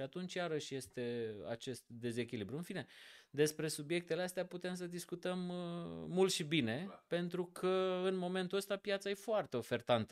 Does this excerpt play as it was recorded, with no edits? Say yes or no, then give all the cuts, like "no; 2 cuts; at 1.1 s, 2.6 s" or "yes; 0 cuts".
yes; 0 cuts